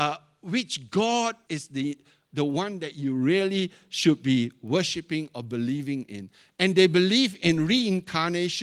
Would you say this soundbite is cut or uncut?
cut